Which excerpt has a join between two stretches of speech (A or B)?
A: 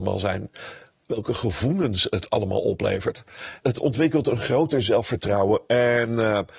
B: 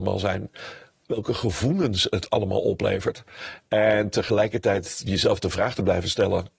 A